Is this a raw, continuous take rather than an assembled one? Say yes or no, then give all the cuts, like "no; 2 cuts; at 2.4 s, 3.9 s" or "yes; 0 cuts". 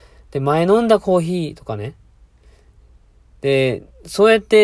yes; 0 cuts